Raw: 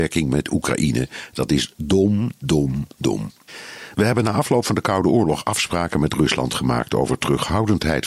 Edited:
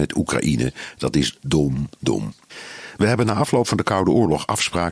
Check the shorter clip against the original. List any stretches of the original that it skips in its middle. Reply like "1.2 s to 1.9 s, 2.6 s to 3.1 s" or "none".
1.7 s to 2.4 s